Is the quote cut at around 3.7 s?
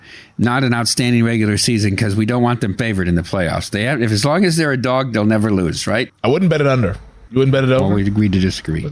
no; 2 cuts; at 6.1 s, 7.3 s

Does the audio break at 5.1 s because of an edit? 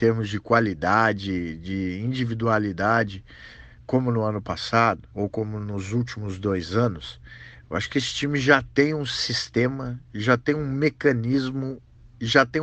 yes; 1 cut; at 5.1 s

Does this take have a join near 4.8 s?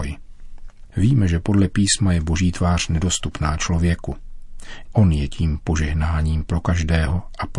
yes; 1 cut; at 4.8 s

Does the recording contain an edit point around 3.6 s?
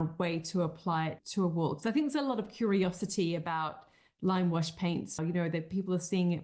no; 2 cuts; at 1.2 s, 5.2 s

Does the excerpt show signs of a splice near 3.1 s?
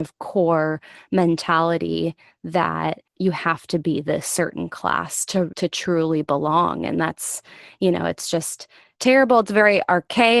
yes; 2 cuts; at 3.1 s, 5.5 s

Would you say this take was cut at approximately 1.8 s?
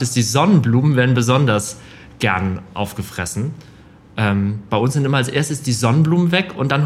no; 1 cut; at 4.7 s

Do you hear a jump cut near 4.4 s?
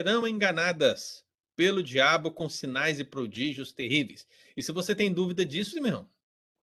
no; 1 cut; at 5.7 s

